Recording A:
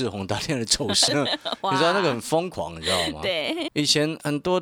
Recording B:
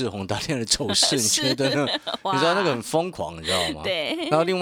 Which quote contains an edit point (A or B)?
A